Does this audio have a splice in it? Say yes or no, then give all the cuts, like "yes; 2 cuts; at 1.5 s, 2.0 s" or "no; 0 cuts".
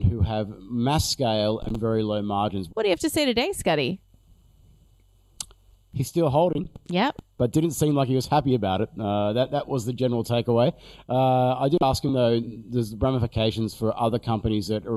yes; 1 cut; at 2.7 s